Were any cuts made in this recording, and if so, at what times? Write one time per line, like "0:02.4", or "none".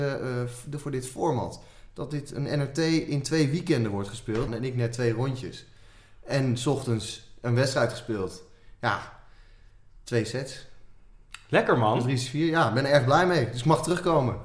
0:04.5